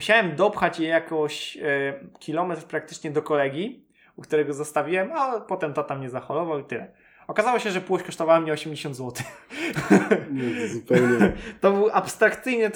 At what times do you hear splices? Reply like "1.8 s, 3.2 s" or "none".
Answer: none